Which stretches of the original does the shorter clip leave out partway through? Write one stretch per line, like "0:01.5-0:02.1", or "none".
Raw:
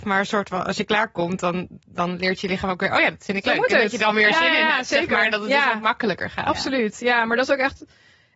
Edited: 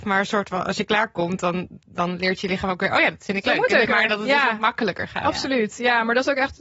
0:03.8-0:05.1